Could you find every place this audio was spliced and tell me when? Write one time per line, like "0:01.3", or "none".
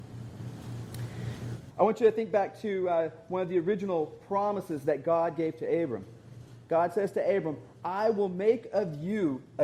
0:01.7